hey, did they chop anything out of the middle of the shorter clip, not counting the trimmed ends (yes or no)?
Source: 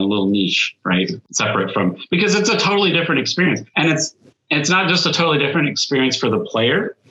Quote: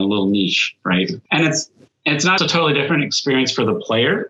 yes